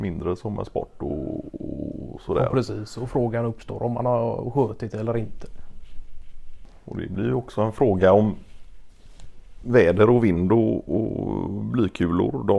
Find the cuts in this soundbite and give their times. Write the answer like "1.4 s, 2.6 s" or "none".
none